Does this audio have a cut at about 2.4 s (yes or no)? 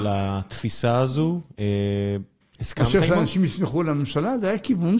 yes